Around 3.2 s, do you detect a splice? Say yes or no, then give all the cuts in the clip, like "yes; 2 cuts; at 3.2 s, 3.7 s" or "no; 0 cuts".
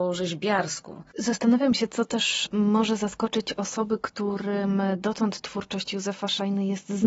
no; 1 cut; at 1.1 s